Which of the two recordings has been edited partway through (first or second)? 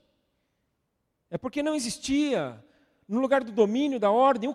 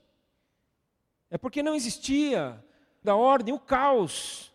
second